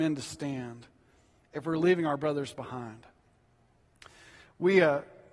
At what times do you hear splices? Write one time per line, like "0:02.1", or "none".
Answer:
none